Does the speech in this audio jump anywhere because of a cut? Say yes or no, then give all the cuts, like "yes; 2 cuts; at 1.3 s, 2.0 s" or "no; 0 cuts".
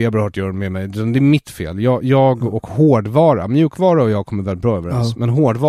no; 0 cuts